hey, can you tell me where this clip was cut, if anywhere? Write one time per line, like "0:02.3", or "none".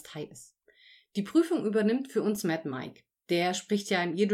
none